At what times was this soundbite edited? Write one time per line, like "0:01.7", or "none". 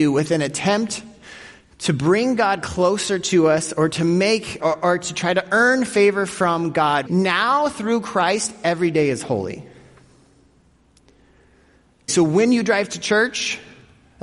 0:04.6
0:07.1
0:12.1